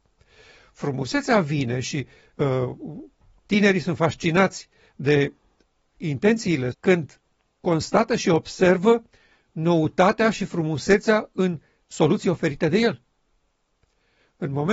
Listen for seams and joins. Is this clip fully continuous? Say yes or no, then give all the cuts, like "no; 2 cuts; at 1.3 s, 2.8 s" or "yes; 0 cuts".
no; 1 cut; at 6.7 s